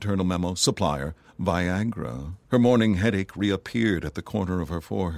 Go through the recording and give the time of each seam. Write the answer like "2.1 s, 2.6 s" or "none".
2.4 s